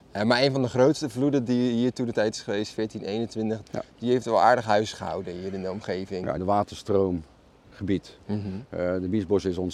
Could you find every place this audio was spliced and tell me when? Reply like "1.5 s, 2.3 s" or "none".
3.6 s, 6.4 s